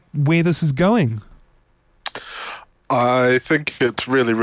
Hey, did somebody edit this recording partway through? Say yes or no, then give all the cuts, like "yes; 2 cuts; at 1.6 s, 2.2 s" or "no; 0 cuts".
no; 0 cuts